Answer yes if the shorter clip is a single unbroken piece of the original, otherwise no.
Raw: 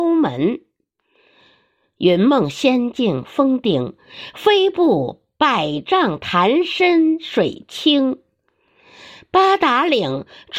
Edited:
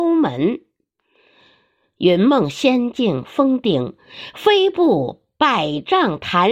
yes